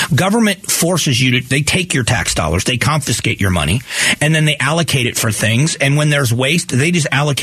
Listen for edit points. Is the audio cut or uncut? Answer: uncut